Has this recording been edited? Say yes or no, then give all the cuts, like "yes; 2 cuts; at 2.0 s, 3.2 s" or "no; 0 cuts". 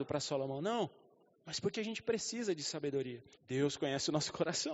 yes; 2 cuts; at 1.7 s, 3.3 s